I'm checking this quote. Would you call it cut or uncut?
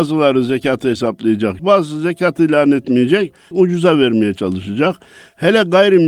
cut